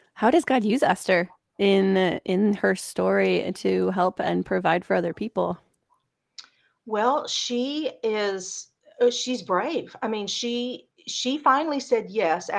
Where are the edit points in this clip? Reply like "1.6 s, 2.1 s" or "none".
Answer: none